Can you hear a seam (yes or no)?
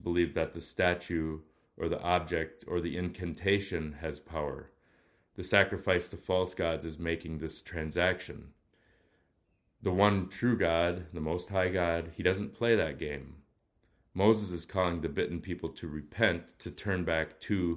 no